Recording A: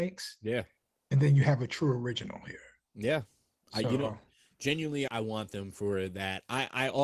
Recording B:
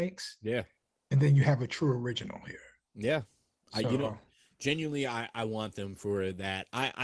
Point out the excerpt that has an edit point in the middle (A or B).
A